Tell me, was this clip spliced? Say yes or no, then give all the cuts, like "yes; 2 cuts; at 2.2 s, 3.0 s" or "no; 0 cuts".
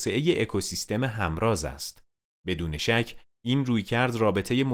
no; 0 cuts